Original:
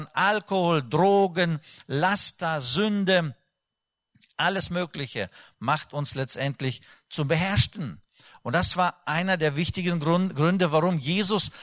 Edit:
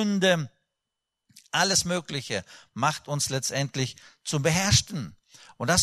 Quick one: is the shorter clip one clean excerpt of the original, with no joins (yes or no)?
yes